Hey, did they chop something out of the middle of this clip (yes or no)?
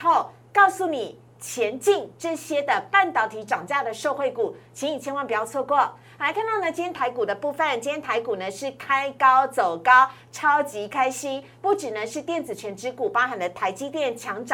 no